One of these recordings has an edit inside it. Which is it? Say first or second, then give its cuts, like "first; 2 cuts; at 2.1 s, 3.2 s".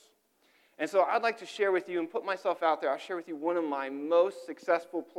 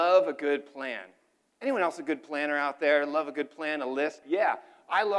second; 1 cut; at 4.2 s